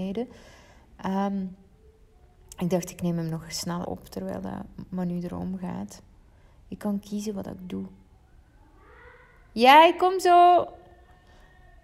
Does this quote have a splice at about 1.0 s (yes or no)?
no